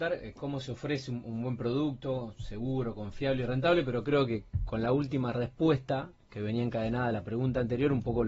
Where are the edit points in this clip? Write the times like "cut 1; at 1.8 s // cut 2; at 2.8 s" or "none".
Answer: none